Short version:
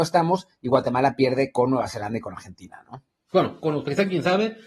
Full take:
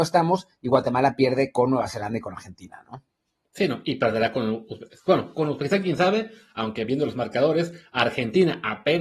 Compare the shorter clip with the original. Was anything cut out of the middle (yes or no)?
yes